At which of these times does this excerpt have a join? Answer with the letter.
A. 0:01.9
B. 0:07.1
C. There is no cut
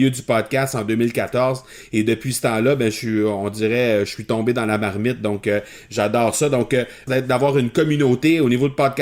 B